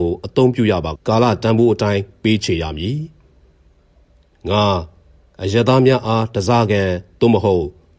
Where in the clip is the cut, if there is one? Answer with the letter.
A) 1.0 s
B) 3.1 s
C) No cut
A